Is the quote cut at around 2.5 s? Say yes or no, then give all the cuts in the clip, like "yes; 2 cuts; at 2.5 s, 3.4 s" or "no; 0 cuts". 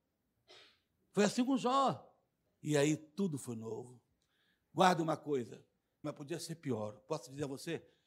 yes; 2 cuts; at 2.5 s, 6.0 s